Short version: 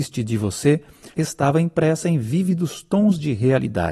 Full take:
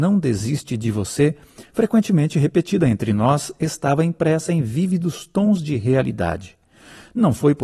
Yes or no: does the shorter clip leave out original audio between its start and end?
yes